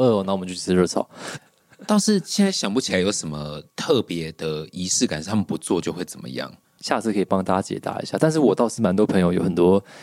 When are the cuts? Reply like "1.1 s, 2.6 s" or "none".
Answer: 1.4 s, 3.7 s